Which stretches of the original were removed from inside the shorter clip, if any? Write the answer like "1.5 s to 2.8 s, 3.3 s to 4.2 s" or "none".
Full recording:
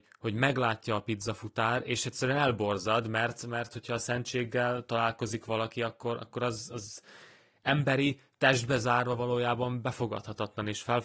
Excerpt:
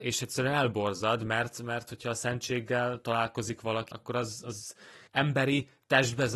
5.7 s to 6.2 s, 7.3 s to 7.6 s